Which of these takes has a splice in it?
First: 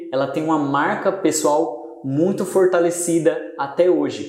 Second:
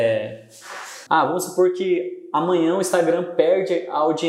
second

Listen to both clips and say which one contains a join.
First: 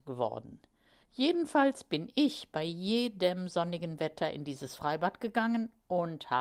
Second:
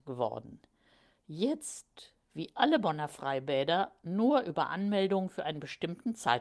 first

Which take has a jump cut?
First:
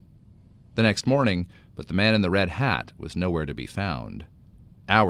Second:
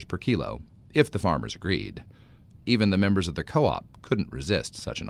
first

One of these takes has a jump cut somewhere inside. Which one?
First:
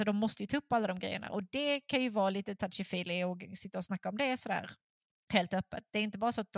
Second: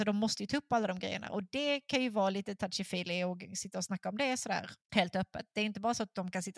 second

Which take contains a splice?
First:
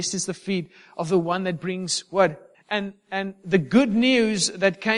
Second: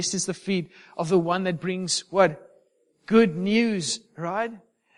first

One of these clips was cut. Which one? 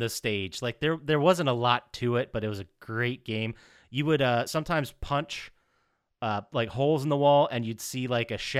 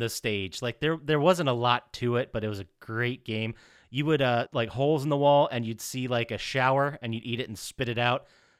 second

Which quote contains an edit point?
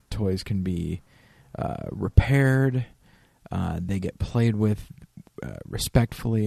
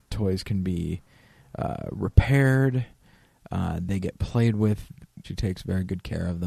second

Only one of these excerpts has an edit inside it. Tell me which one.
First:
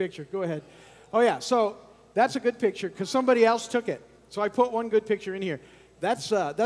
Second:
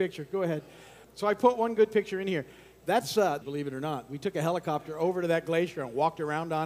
second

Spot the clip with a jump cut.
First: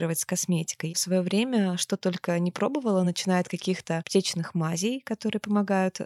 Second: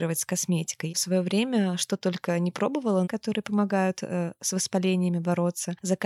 second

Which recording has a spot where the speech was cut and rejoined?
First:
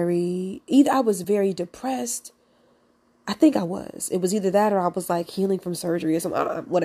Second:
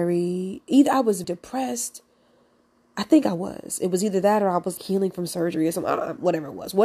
second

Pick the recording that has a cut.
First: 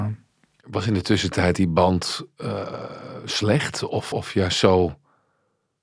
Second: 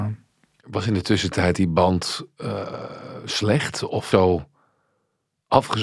second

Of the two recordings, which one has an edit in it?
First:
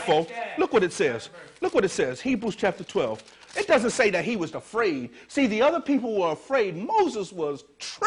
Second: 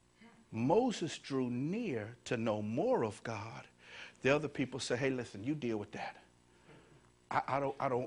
first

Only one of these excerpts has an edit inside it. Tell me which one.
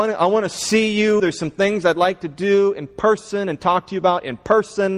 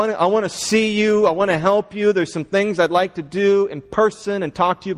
first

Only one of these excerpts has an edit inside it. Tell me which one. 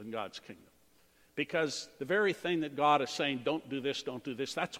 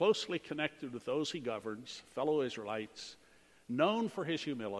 first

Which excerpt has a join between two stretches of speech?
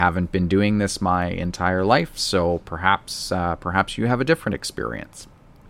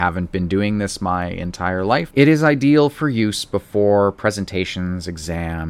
second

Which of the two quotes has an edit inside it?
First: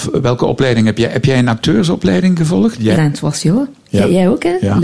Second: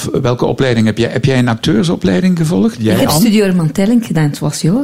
first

